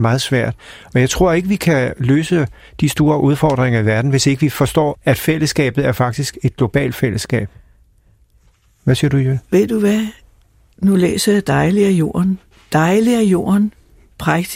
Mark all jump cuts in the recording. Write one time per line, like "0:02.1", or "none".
0:04.9